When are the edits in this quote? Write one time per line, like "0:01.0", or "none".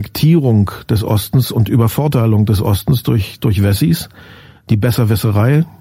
none